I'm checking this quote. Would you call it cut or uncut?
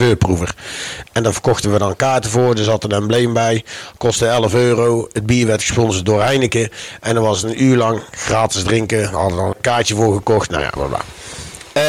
cut